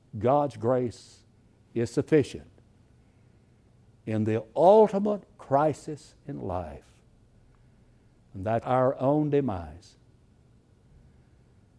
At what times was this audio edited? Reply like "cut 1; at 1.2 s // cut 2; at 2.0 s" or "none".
cut 1; at 8.6 s